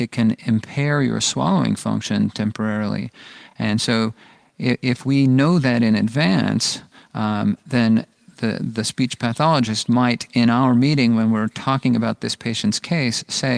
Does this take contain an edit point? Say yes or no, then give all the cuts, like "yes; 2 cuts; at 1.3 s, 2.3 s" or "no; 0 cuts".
no; 0 cuts